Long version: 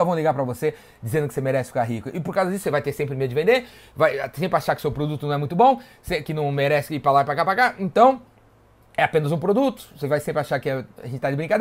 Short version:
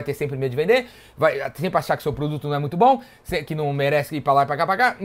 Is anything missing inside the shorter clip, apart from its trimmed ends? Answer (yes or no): no